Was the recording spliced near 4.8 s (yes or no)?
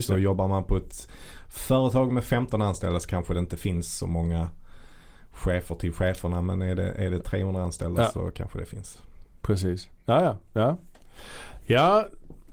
no